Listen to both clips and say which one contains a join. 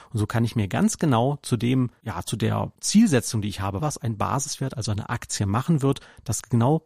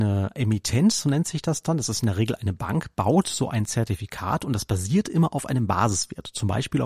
first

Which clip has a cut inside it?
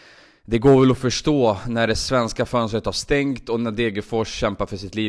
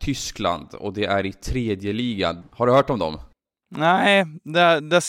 second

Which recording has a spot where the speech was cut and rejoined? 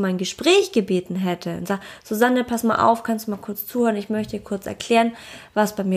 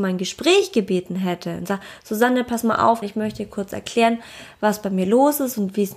second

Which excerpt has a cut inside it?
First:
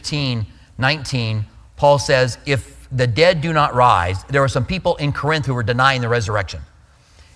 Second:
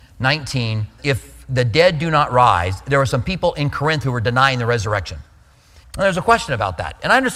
second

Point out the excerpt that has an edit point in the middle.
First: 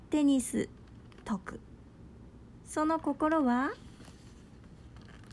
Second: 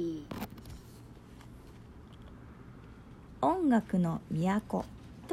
first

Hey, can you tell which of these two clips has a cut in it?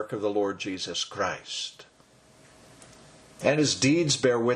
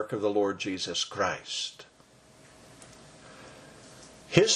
first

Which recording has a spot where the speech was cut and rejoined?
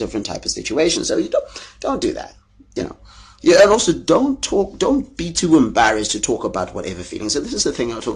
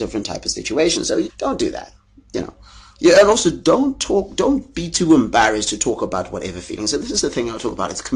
second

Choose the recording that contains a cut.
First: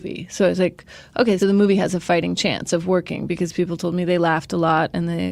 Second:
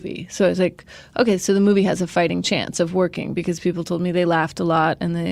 first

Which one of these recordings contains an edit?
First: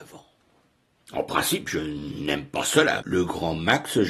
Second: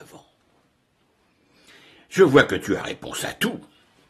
first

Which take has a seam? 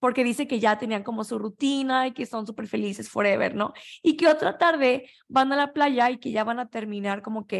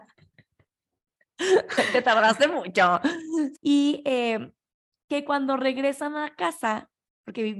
second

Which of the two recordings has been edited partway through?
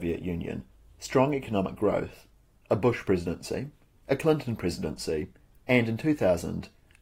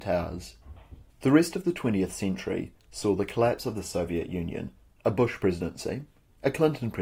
second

